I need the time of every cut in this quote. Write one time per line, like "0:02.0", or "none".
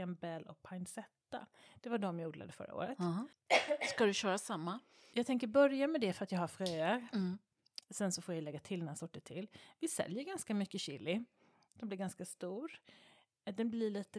0:07.8
0:11.7